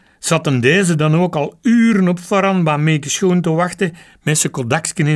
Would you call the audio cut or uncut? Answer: uncut